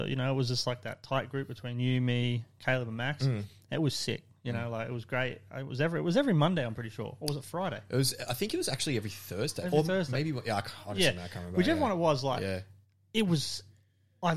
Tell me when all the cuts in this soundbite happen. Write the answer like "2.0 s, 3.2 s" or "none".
none